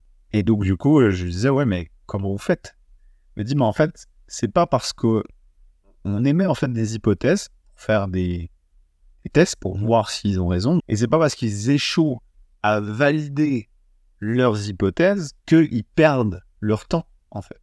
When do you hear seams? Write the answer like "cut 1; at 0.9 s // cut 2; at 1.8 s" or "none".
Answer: cut 1; at 10.8 s // cut 2; at 15.4 s